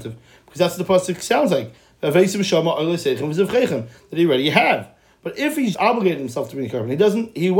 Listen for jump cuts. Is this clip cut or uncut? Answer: cut